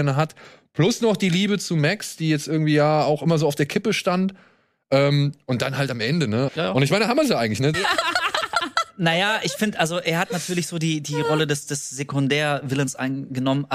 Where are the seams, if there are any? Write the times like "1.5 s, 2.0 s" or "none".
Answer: 6.5 s, 7.7 s